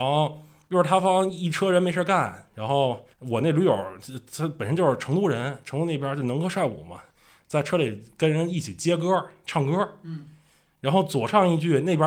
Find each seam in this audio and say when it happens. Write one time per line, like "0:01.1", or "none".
0:03.1